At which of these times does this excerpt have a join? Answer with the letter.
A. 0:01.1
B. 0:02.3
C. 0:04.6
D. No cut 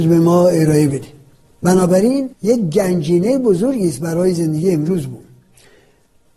B